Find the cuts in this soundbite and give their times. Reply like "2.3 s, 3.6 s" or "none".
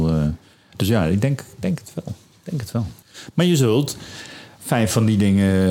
3.0 s